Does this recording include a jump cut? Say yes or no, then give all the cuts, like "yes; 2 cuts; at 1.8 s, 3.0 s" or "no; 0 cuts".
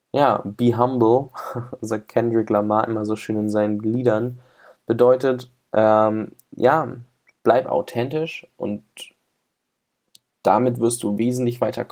no; 0 cuts